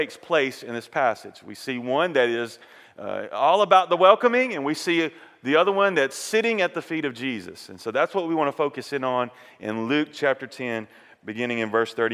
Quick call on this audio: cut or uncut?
uncut